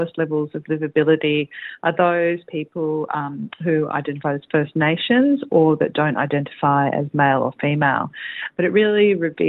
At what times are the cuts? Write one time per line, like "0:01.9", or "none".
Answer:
0:08.5